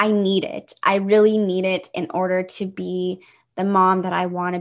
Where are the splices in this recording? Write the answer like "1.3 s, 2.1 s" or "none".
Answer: none